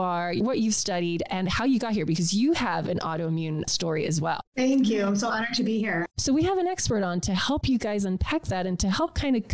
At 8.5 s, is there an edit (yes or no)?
no